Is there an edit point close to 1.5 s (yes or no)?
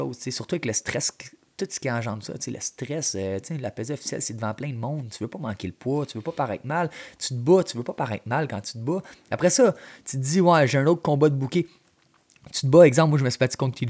yes